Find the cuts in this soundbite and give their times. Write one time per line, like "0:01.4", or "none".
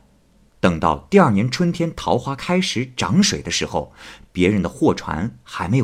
none